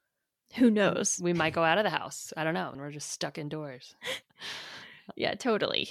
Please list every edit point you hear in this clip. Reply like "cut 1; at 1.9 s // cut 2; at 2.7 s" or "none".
cut 1; at 2.7 s // cut 2; at 4.2 s